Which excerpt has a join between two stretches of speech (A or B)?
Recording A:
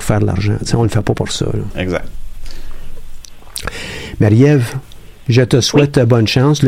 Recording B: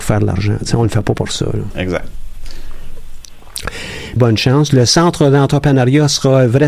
B